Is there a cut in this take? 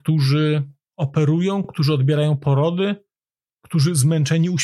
no; 0 cuts

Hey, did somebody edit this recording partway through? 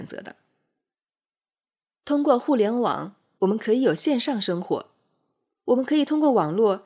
yes; 1 cut; at 3.4 s

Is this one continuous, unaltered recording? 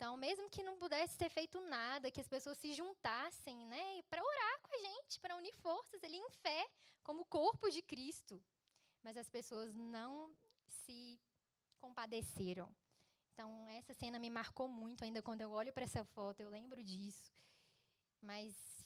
yes; 0 cuts

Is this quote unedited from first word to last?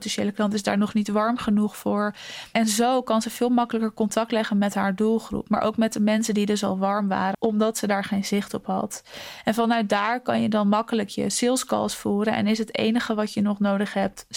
no; 1 cut; at 7.3 s

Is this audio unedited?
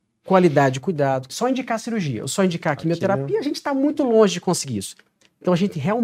no; 1 cut; at 1.3 s

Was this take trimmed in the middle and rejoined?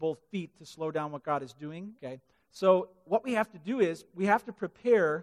yes; 1 cut; at 2.0 s

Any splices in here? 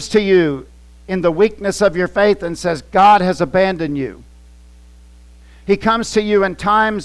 no; 0 cuts

